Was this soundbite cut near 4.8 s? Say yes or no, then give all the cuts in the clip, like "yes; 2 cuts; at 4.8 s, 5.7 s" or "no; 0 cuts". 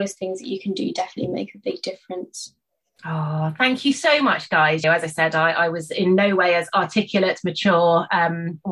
yes; 1 cut; at 4.8 s